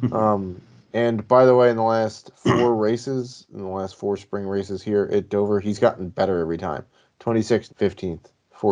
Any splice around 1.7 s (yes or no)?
no